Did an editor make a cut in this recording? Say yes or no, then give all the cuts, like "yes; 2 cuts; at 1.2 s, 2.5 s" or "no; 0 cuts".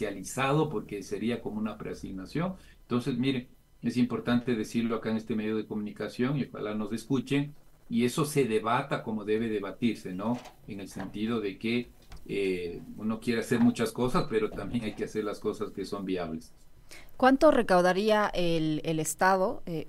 no; 0 cuts